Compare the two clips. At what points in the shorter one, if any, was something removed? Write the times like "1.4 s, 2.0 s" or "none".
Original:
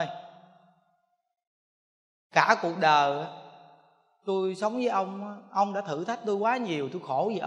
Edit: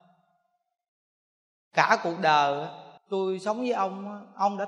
3.0 s